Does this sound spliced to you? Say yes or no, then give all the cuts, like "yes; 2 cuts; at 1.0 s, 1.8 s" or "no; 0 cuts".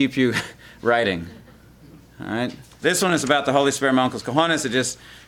yes; 1 cut; at 2.8 s